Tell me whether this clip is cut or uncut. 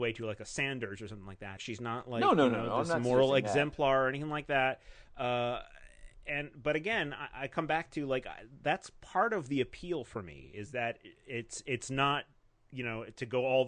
cut